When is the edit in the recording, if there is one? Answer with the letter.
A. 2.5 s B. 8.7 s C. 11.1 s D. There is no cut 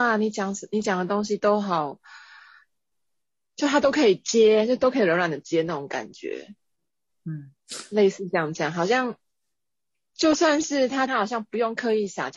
C